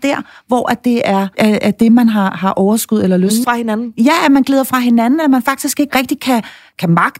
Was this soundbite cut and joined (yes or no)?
yes